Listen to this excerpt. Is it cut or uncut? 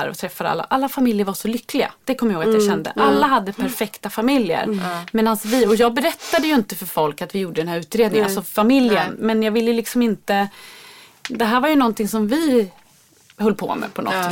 uncut